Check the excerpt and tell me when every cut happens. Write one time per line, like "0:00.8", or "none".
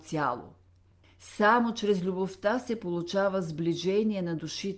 0:01.0